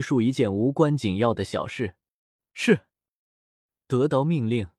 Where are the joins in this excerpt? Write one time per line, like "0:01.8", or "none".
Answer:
0:02.4

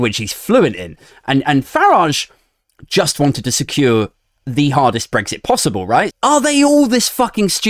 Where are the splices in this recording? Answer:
0:06.1

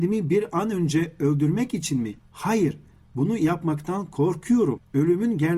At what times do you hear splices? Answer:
none

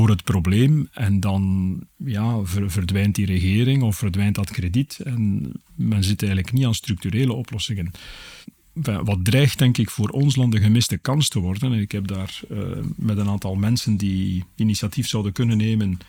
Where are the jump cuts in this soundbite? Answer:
none

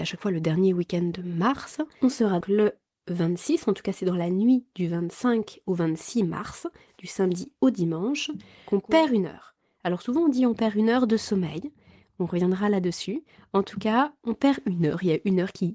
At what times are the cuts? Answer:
0:02.4

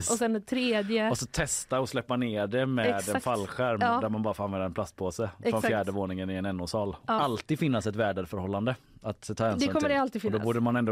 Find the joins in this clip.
0:07.2

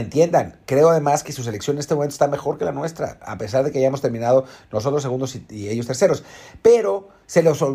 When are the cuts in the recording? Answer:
none

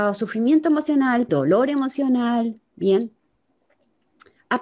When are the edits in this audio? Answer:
0:01.3

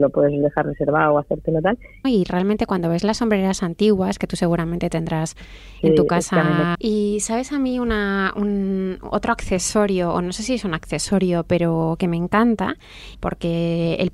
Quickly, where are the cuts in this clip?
0:02.0
0:06.7
0:13.1

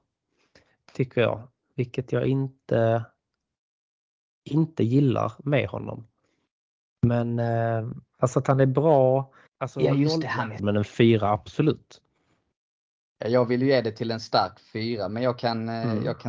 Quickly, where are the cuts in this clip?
0:09.5
0:10.6

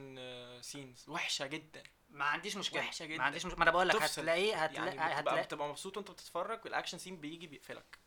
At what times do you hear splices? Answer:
none

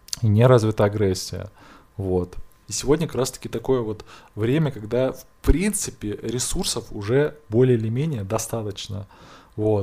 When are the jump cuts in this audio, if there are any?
0:02.6

